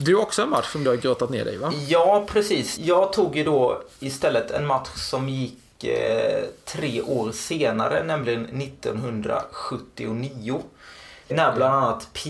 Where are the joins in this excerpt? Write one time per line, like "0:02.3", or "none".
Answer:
0:11.2